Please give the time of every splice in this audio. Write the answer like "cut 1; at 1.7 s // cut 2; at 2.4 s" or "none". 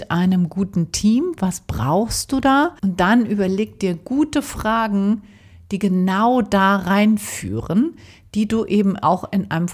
cut 1; at 2.8 s

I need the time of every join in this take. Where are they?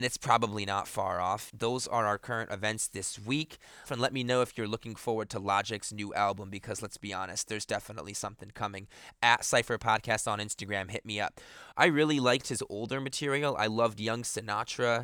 cut 1; at 1.5 s // cut 2; at 3.9 s // cut 3; at 11.7 s

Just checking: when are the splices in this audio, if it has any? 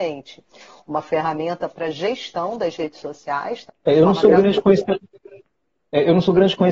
cut 1; at 3.7 s

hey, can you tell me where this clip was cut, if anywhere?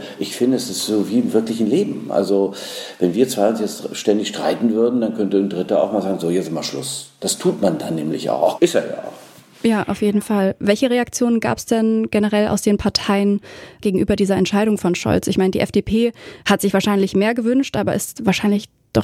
cut 1; at 8.6 s // cut 2; at 13.8 s

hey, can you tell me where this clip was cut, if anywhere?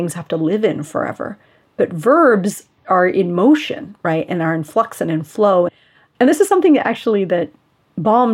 none

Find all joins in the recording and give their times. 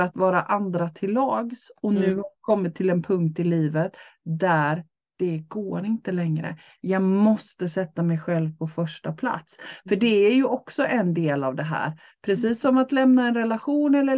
none

